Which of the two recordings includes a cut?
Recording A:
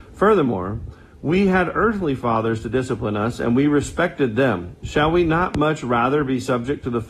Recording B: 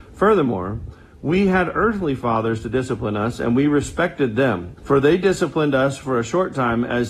B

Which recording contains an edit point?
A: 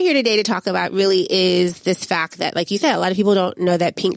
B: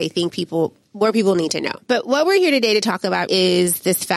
B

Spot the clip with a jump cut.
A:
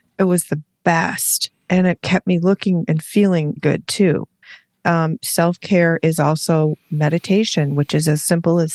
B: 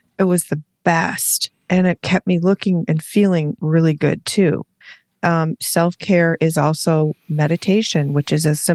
A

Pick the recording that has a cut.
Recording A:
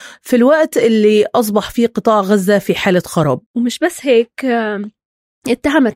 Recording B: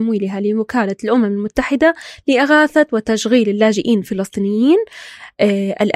A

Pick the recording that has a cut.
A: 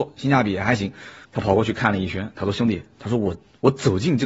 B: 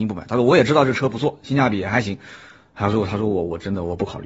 A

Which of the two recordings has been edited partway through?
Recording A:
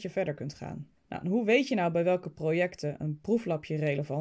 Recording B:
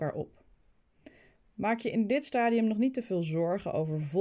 A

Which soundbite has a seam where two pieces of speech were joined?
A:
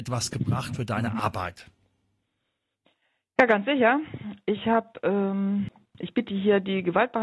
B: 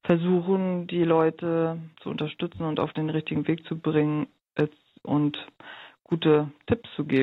B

